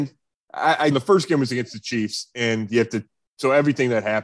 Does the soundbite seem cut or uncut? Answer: cut